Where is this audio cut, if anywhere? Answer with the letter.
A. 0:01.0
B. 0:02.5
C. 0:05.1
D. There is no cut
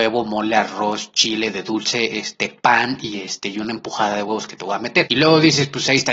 C